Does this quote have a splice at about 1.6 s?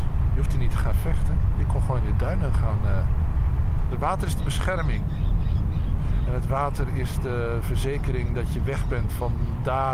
no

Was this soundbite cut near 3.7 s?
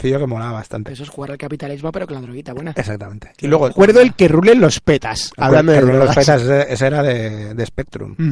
yes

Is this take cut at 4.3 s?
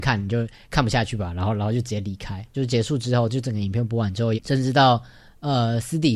yes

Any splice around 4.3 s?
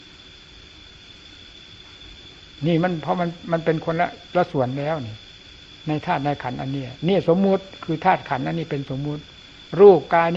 yes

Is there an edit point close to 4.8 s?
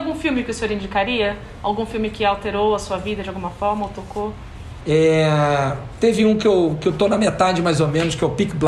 yes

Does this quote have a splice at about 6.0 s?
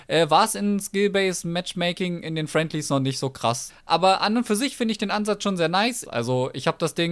yes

